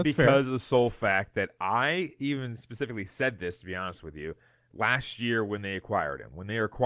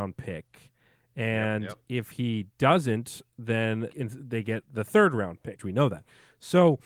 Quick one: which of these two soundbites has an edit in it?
second; 2 cuts; at 3.9 s, 5.6 s

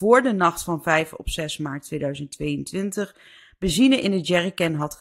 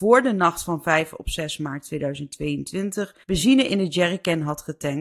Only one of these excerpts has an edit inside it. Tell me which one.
second; 1 cut; at 3.2 s

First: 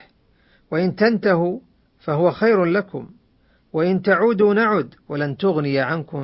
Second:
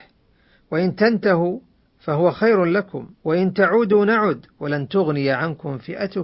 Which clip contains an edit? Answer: second; 1 cut; at 3.1 s

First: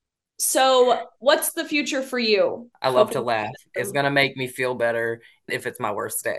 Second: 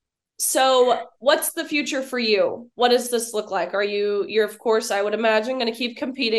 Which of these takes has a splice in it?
first; 2 cuts; at 2.7 s, 5.5 s

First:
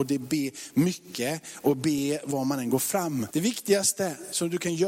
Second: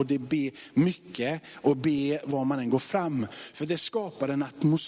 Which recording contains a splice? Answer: first; 1 cut; at 3.3 s

